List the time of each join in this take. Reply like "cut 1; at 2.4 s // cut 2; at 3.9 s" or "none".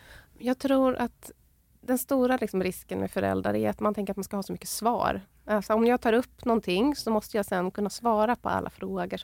none